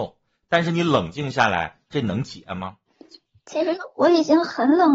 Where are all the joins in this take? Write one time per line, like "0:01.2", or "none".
0:01.9